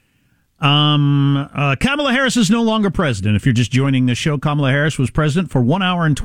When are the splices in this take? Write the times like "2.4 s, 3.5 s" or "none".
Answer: none